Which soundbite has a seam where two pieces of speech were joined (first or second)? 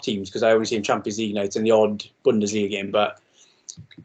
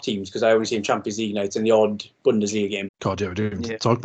second